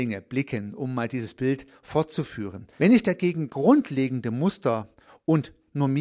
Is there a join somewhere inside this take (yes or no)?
yes